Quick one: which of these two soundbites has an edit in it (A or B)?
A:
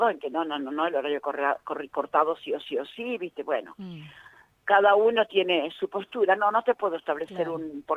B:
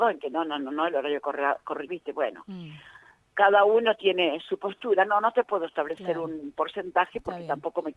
B